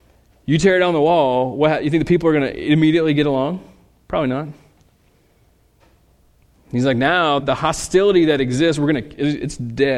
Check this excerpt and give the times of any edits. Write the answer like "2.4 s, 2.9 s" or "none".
7.4 s